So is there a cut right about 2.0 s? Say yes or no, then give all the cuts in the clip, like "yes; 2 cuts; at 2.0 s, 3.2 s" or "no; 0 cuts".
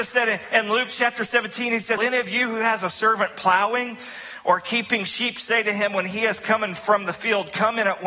yes; 1 cut; at 2.0 s